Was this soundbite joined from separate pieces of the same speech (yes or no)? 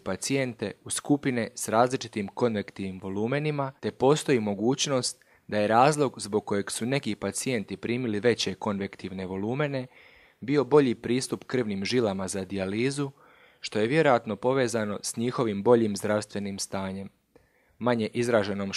yes